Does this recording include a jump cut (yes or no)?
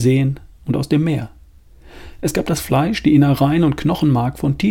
no